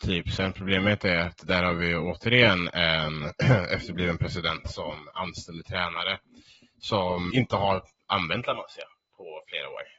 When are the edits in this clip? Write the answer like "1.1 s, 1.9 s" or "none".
7.3 s